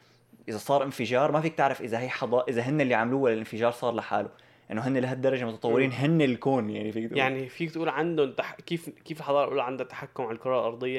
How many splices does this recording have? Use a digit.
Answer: 0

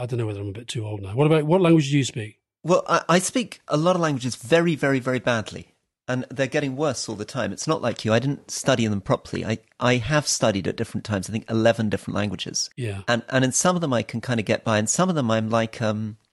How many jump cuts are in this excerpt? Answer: 1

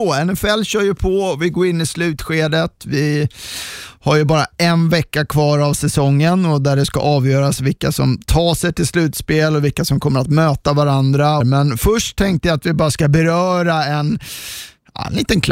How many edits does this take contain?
1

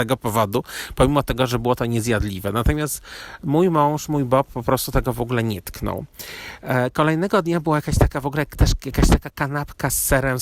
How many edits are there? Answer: 0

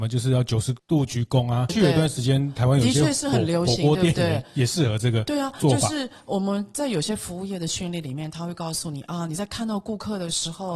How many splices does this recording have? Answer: 1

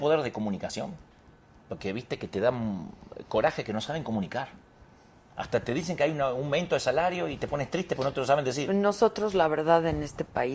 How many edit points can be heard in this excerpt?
0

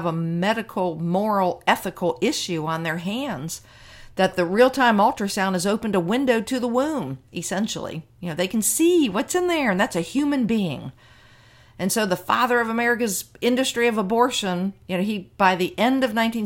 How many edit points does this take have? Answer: 0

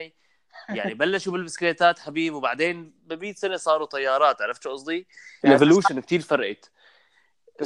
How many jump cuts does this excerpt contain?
1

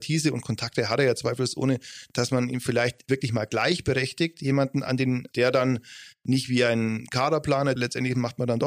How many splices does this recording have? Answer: 2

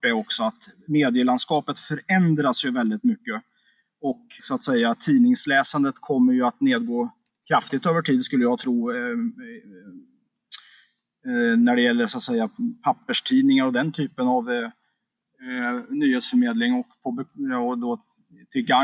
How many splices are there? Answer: 1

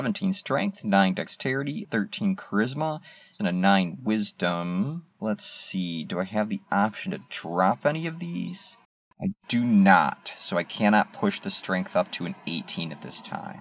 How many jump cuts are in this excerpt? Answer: 2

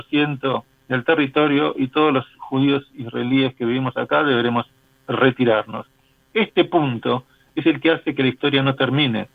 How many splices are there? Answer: 0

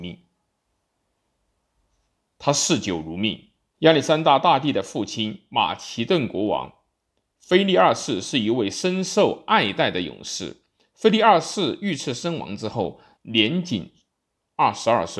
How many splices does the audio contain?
2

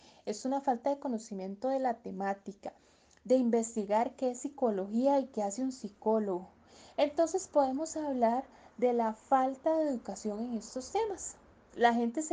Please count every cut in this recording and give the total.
0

